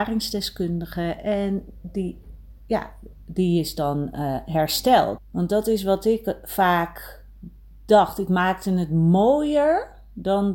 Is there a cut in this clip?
yes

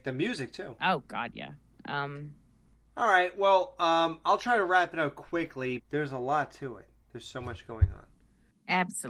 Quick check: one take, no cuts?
no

